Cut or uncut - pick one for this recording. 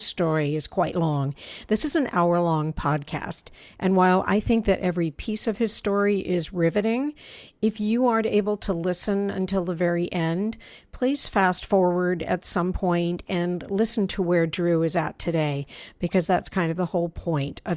uncut